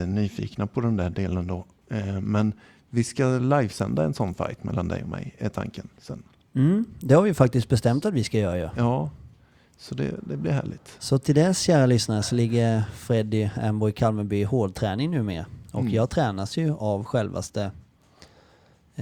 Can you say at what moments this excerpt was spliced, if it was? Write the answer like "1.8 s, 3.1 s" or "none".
none